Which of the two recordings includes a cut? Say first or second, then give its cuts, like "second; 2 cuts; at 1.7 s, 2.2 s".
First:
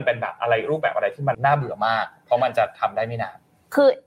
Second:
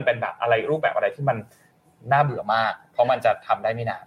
first; 1 cut; at 1.3 s